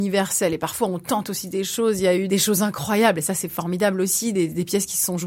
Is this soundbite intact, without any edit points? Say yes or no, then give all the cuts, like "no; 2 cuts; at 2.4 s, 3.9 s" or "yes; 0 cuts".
yes; 0 cuts